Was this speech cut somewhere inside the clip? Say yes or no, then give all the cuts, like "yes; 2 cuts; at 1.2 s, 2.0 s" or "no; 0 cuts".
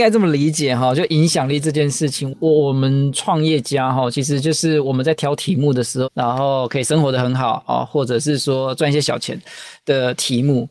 yes; 1 cut; at 6.0 s